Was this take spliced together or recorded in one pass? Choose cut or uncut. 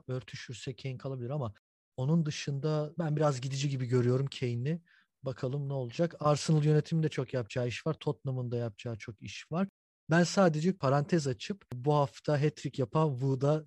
uncut